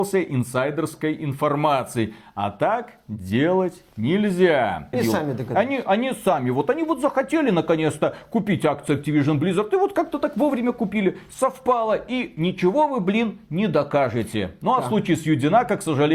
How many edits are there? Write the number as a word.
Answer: one